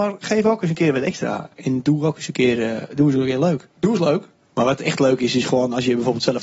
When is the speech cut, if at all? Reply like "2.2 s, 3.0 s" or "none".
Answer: 4.5 s